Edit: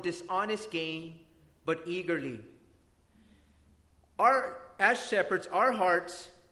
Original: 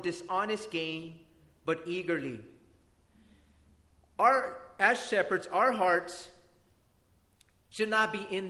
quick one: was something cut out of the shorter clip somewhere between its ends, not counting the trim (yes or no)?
no